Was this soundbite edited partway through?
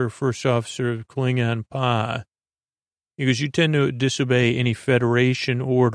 no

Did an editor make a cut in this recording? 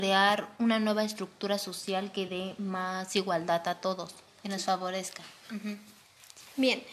yes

